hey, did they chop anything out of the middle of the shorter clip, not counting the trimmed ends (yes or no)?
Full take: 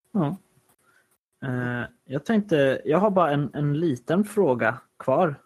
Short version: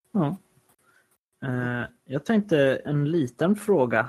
yes